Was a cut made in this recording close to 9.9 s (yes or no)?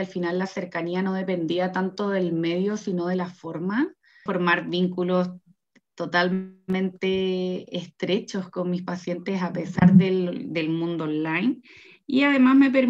no